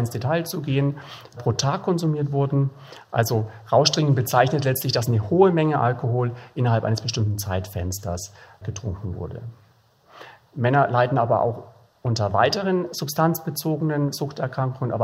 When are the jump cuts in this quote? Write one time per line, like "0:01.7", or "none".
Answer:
none